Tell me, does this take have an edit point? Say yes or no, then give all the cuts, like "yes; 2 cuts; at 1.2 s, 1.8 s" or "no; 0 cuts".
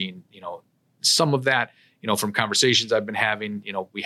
no; 0 cuts